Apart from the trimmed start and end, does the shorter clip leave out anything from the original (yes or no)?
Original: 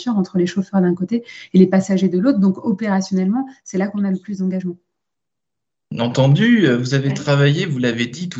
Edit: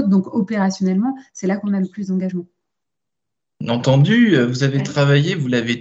no